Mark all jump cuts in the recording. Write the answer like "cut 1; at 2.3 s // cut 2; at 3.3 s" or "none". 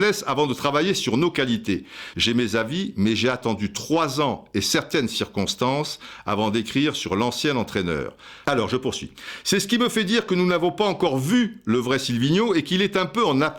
cut 1; at 2.1 s // cut 2; at 8.4 s